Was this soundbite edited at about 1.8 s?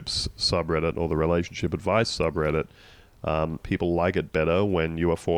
no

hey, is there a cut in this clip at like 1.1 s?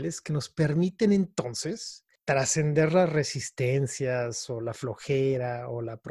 no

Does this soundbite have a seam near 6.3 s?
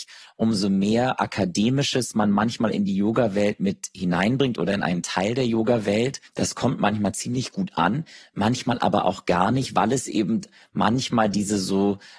yes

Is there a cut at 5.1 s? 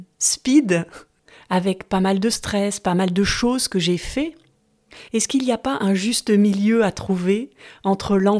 yes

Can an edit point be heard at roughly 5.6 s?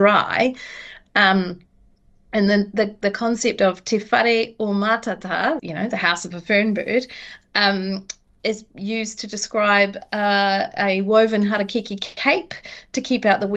yes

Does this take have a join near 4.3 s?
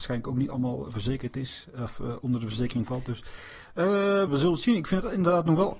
yes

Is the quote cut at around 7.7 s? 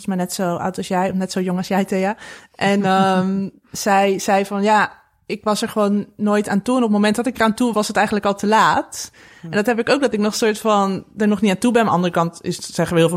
yes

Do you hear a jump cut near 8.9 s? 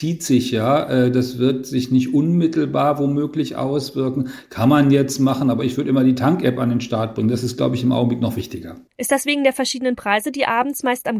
no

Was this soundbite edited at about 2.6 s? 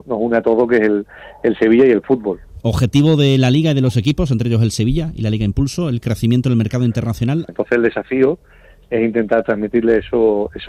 yes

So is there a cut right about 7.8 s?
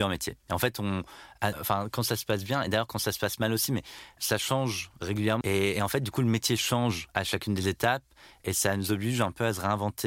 no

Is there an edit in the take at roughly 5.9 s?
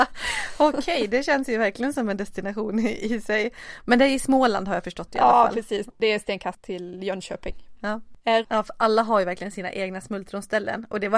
no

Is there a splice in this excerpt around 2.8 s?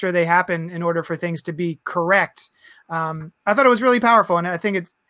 no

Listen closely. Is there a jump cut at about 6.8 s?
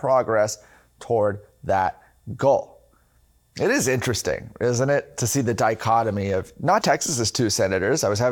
yes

